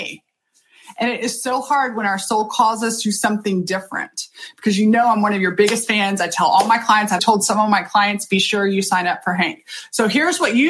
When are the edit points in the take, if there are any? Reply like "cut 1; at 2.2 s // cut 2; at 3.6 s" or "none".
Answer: cut 1; at 7.2 s